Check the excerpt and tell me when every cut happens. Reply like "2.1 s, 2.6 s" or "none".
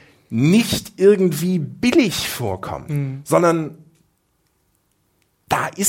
none